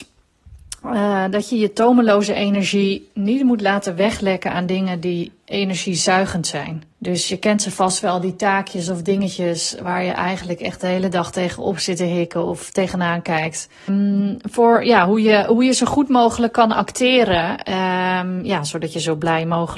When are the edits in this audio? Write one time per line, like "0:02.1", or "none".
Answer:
0:06.9
0:13.9